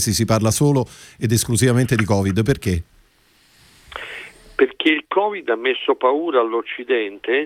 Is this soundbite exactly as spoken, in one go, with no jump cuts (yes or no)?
yes